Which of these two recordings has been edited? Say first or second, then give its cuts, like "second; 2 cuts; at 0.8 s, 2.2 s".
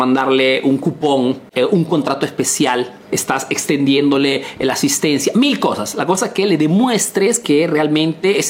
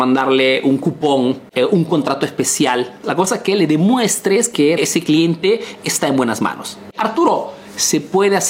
second; 2 cuts; at 3.0 s, 4.8 s